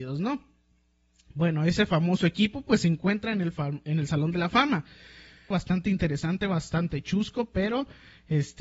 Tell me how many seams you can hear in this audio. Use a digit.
1